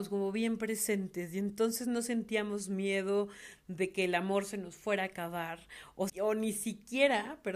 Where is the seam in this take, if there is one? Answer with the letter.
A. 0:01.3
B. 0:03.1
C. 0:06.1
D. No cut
C